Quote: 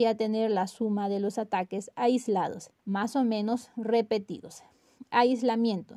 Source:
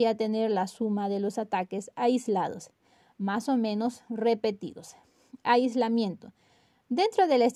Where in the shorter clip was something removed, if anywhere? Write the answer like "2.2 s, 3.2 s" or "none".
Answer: 2.8 s